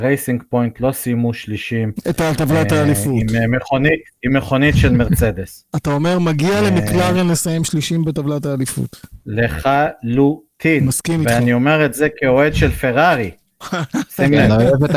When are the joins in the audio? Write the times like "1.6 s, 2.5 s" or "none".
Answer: none